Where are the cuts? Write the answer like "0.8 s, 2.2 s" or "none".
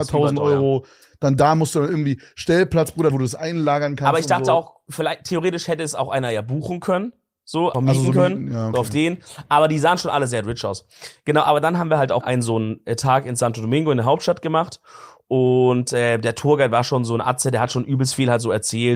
3.1 s, 7.7 s, 12.2 s